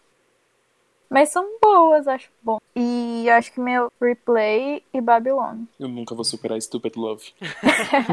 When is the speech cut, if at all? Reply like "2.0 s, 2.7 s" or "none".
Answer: 2.6 s, 3.9 s, 5.7 s